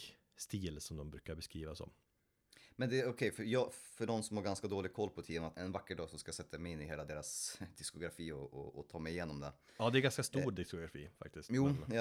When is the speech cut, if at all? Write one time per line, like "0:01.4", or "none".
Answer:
0:05.5